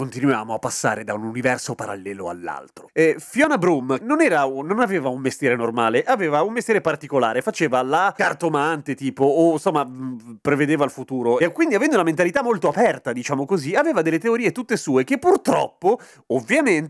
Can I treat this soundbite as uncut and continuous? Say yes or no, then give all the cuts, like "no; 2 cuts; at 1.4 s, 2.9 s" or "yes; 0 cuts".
no; 2 cuts; at 2.9 s, 4.0 s